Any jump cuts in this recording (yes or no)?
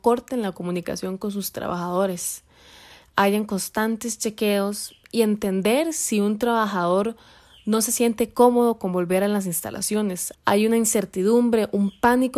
yes